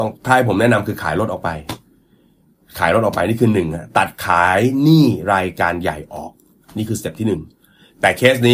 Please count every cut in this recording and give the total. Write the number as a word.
zero